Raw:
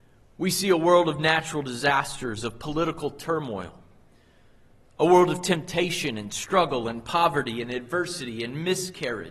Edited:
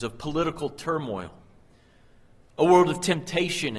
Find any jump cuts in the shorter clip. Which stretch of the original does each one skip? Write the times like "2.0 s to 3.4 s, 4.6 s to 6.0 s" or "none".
none